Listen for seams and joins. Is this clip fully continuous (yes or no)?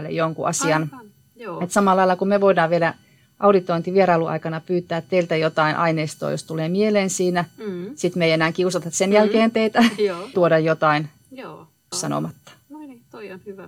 no